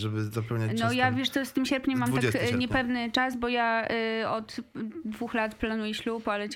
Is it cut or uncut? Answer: uncut